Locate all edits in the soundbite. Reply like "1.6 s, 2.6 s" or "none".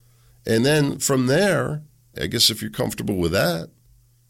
2.1 s